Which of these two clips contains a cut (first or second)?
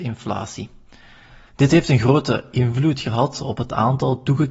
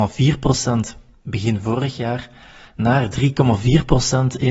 first